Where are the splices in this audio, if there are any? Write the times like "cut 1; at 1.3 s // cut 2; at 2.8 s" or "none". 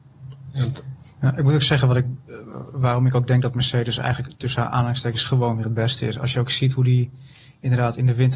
none